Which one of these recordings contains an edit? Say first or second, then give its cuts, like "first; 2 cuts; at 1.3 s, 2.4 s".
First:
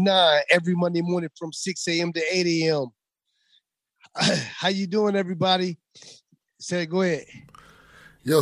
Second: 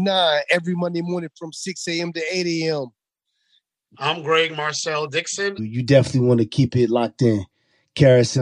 second; 2 cuts; at 3.9 s, 5.6 s